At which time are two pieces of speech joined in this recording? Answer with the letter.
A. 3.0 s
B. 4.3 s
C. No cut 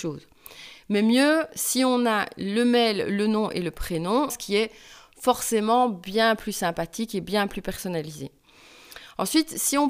B